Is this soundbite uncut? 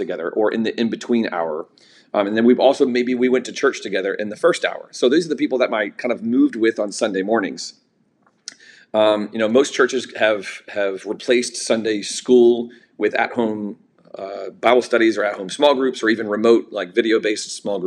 yes; 0 cuts

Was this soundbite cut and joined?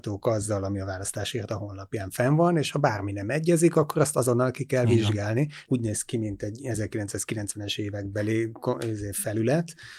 yes; 1 cut; at 5.7 s

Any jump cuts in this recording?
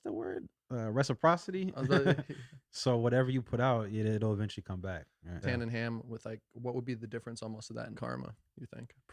yes; 2 cuts; at 5.4 s, 7.9 s

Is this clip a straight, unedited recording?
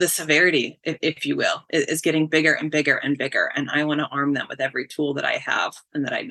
yes; 0 cuts

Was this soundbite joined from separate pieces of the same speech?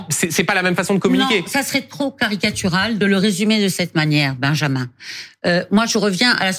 no; 0 cuts

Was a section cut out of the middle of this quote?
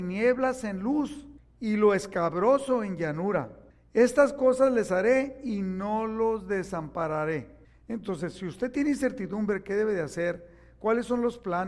no; 0 cuts

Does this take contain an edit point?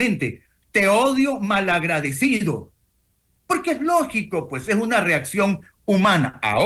no; 0 cuts

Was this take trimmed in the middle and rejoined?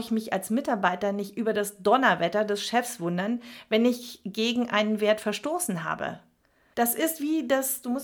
yes; 1 cut; at 6.7 s

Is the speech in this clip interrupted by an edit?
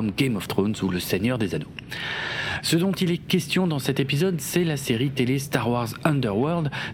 yes; 1 cut; at 2.6 s

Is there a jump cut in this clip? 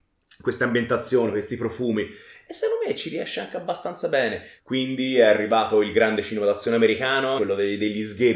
yes; 2 cuts; at 4.6 s, 7.4 s

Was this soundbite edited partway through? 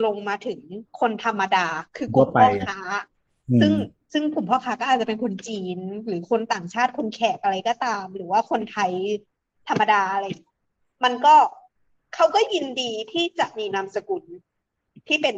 no; 0 cuts

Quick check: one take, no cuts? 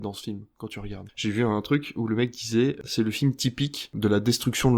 no; 1 cut; at 1.1 s

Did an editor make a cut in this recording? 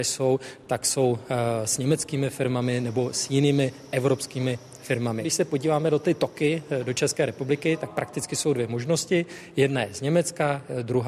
no; 0 cuts

